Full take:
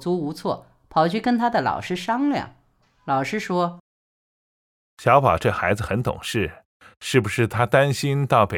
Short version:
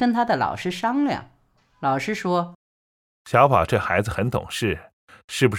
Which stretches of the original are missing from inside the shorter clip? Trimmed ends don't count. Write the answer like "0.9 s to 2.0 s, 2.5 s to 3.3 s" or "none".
3.8 s to 4.3 s

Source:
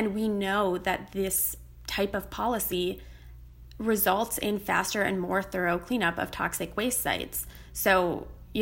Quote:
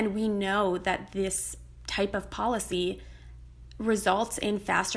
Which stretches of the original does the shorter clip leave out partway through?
none

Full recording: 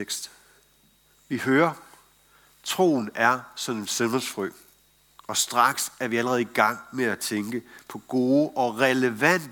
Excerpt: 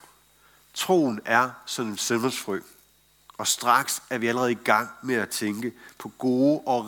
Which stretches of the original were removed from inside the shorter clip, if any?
none

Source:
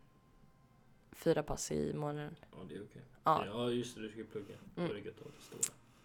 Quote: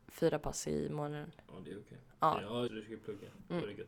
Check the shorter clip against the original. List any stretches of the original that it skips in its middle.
3.7 s to 3.9 s

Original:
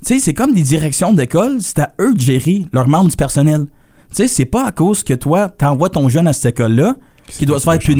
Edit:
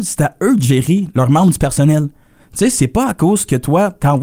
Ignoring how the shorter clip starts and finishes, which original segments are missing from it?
none

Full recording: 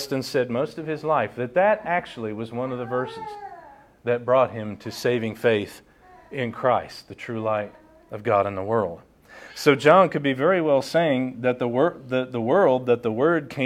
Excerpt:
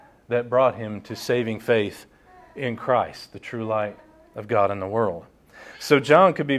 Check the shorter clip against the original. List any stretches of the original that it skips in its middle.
none

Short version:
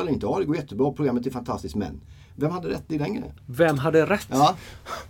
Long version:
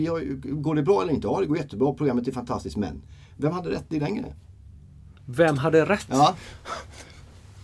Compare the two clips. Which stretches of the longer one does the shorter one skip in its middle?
4.4 s to 5.2 s

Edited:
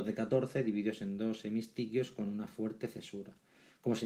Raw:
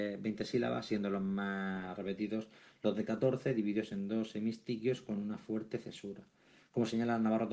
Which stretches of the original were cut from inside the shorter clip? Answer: none

